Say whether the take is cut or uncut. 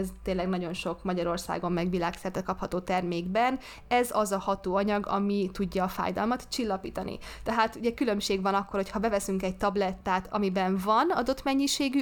uncut